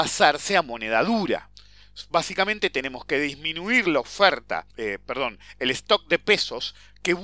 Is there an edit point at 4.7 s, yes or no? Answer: yes